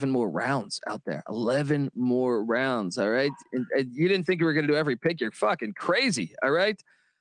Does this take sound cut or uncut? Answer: uncut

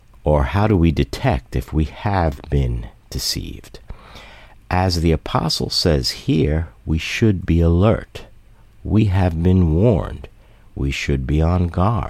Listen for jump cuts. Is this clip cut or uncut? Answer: uncut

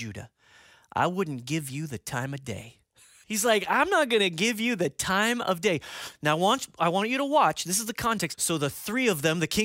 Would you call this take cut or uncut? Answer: cut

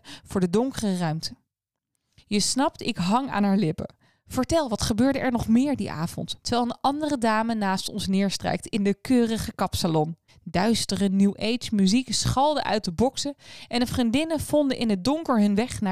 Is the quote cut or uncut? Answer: cut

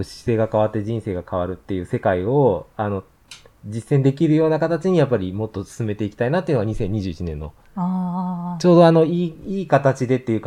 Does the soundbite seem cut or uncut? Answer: uncut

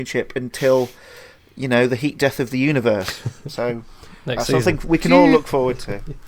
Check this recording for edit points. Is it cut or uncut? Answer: uncut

